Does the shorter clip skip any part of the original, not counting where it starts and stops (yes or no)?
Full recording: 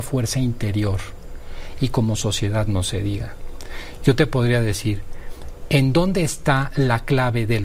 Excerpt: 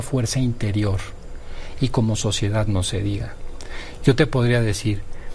no